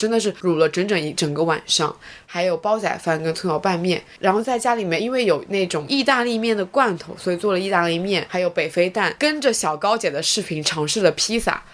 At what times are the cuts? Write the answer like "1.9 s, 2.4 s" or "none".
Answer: none